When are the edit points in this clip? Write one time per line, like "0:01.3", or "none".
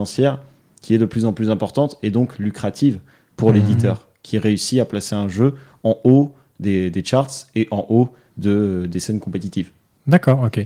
none